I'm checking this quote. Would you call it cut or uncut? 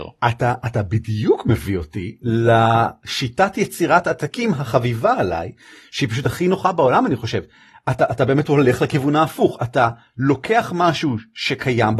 uncut